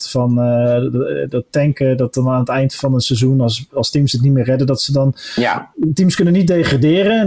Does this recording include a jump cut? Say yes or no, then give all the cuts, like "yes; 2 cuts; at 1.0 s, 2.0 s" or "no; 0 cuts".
no; 0 cuts